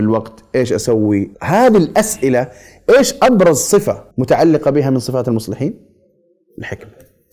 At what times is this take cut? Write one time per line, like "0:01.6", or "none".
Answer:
0:01.3
0:04.1